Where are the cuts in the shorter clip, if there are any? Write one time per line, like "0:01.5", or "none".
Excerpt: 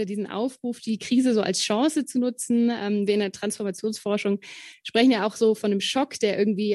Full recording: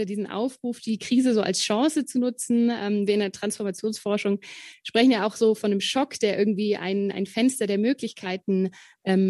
none